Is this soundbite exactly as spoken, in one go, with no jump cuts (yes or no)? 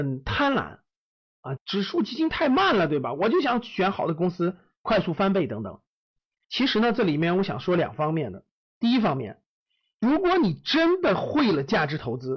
no